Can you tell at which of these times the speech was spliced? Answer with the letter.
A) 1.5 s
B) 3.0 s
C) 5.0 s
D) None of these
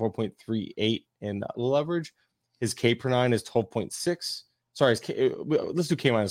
A